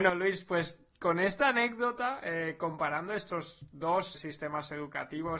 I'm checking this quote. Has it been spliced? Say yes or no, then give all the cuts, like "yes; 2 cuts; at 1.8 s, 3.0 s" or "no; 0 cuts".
yes; 1 cut; at 4.1 s